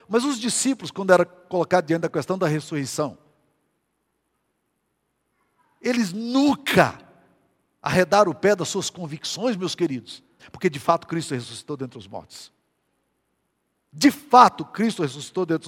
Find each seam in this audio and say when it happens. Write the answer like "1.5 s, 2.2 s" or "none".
10.4 s